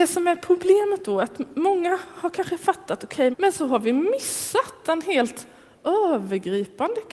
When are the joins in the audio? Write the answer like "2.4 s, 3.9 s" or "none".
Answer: 3.3 s